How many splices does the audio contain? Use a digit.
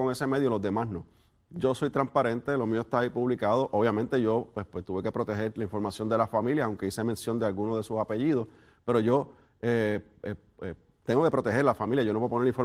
1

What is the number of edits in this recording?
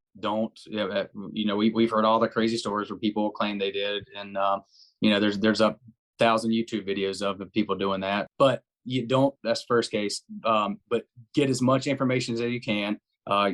1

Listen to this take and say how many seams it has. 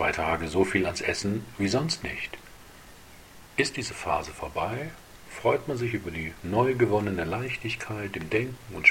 0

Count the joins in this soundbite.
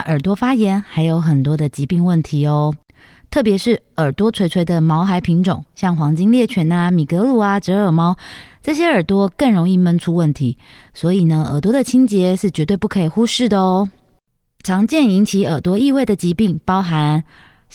0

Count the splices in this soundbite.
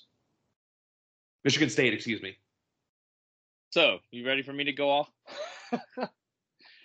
0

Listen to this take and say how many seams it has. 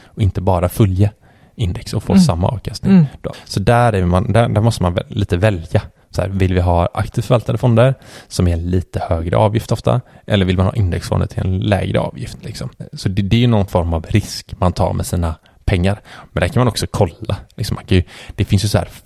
0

